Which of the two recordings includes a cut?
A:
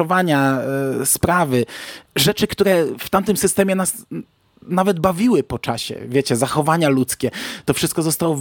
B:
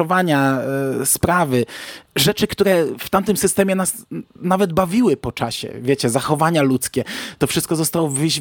B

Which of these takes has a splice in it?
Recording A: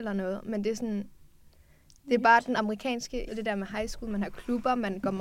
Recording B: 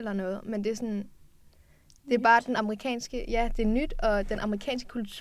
A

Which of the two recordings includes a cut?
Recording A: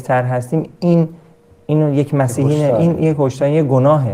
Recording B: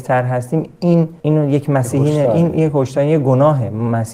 B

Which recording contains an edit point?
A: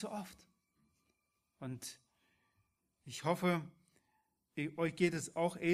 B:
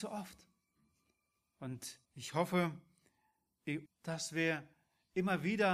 B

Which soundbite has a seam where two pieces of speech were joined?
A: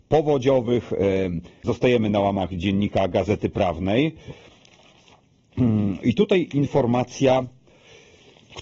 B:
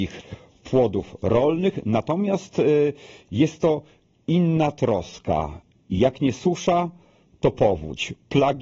A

